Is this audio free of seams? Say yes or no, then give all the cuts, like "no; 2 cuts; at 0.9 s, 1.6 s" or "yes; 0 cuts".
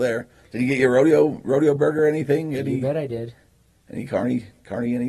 yes; 0 cuts